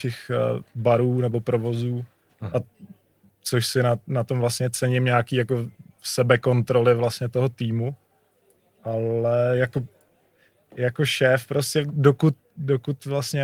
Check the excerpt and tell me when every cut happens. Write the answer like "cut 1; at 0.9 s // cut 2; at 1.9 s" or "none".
none